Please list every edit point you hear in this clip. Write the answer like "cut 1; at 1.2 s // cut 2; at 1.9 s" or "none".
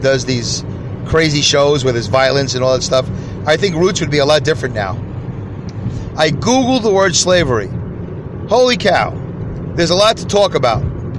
cut 1; at 6.1 s // cut 2; at 9.7 s